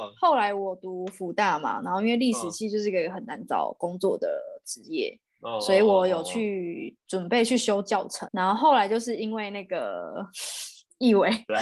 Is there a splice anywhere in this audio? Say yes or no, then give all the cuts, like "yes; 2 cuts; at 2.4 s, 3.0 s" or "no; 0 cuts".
yes; 1 cut; at 8.3 s